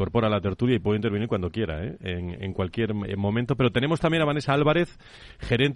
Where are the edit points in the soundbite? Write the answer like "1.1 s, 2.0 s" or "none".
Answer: none